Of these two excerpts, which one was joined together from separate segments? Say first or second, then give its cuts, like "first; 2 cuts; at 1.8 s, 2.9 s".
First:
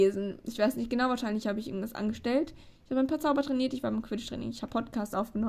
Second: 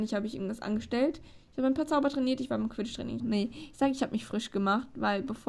second; 1 cut; at 3.2 s